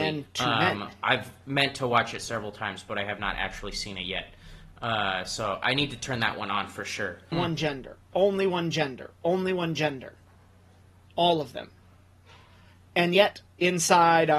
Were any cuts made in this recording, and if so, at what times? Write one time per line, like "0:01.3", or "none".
0:07.3